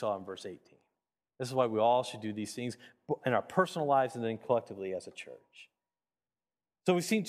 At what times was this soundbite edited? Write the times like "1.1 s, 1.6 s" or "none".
1.3 s

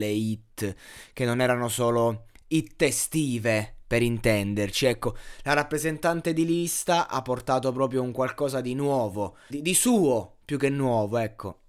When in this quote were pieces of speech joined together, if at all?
9.5 s

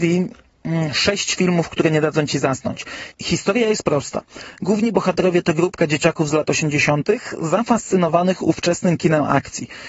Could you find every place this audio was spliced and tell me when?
3.1 s

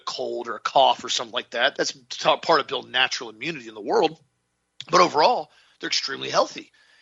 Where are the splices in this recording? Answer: 1.7 s

